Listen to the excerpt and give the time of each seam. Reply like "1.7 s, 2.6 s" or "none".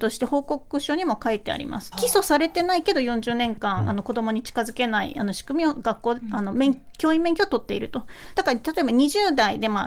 1.9 s, 8.3 s